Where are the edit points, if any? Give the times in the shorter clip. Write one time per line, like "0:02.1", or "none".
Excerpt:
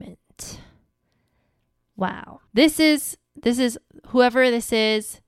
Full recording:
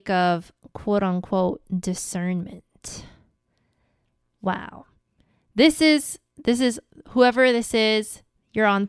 0:02.5